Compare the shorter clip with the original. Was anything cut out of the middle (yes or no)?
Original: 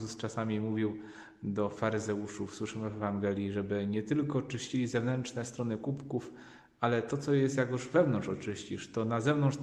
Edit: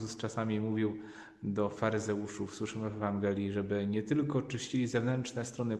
no